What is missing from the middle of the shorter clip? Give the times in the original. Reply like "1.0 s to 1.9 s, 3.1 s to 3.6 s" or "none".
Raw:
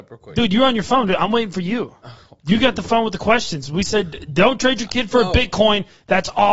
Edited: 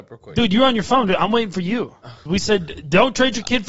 2.3 s to 3.7 s